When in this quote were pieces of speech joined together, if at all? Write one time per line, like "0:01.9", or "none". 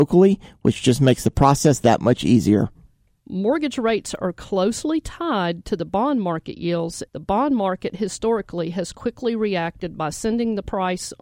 0:03.2
0:07.1